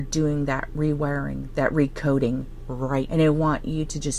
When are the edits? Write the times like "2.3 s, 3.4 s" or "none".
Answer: 3.1 s